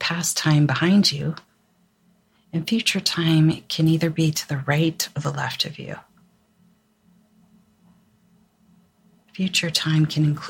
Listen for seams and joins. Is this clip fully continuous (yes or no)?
yes